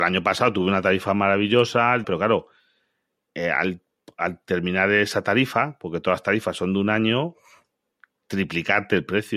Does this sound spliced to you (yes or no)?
yes